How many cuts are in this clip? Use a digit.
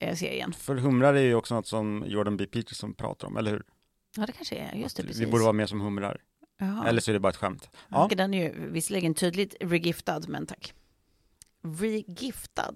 1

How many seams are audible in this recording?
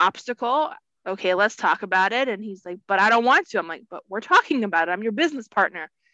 1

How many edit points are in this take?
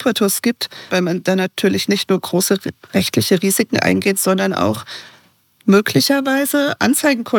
1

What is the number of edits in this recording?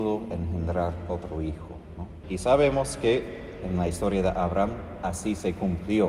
1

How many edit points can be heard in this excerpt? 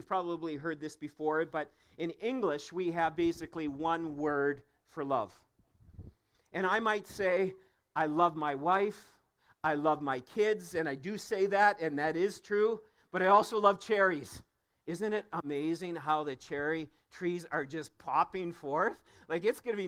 0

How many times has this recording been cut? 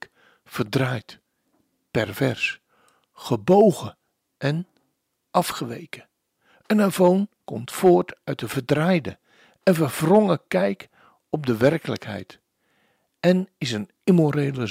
1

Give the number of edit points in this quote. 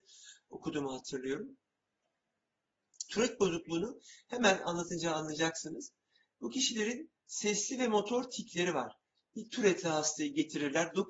1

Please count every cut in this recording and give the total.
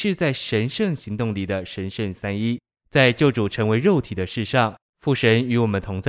2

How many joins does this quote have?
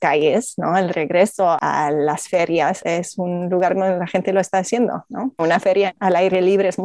1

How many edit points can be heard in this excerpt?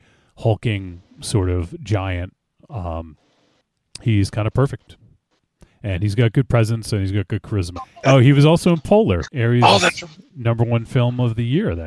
2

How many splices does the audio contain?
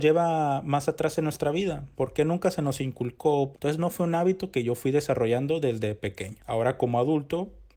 1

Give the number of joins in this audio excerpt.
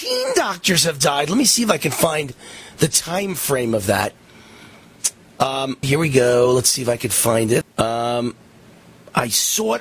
2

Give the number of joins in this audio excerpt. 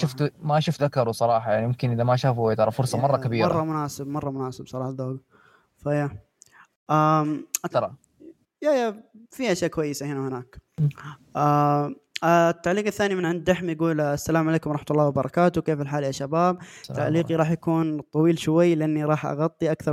1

